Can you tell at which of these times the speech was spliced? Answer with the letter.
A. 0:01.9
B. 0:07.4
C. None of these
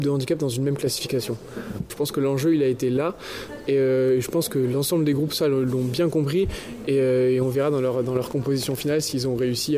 A